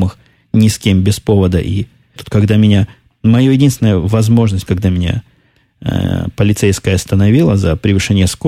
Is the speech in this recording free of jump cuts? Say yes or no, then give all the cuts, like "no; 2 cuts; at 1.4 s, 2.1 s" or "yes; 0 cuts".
no; 2 cuts; at 2.2 s, 4.7 s